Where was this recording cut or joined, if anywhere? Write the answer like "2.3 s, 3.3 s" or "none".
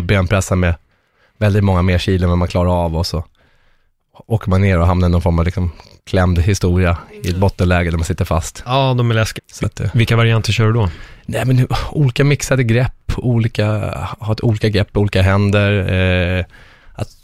9.4 s